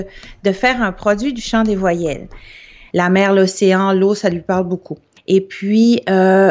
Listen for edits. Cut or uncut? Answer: cut